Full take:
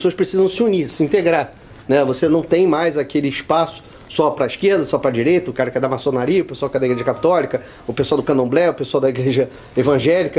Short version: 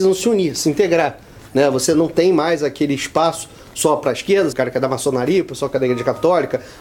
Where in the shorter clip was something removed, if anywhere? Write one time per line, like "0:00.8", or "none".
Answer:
0:04.5